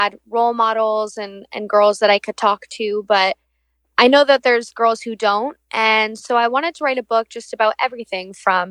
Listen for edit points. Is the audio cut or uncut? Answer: uncut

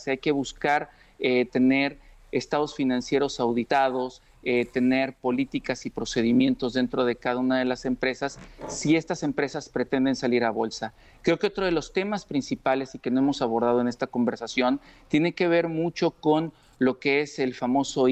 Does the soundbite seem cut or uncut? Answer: uncut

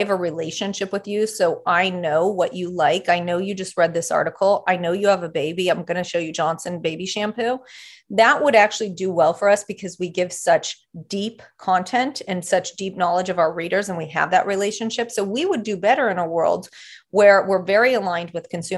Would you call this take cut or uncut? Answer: uncut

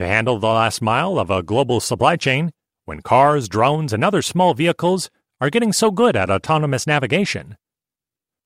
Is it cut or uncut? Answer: uncut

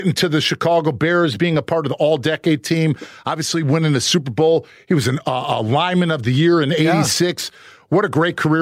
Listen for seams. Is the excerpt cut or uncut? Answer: uncut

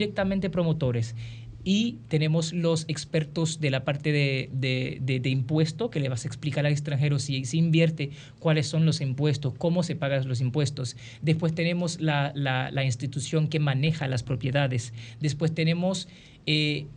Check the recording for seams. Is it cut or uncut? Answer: uncut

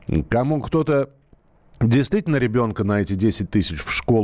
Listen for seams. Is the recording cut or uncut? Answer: uncut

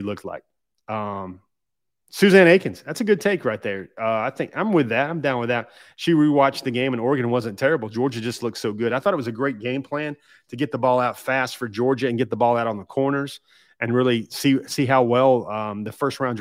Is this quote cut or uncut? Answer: uncut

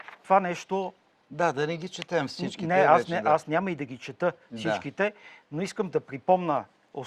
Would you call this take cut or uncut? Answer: uncut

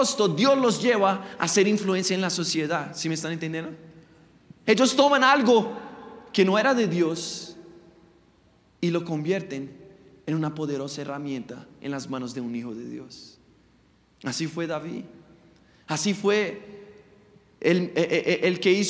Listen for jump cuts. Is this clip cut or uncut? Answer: cut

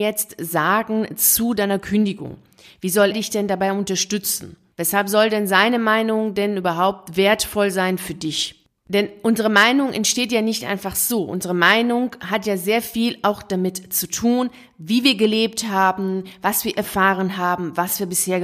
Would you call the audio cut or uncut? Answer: cut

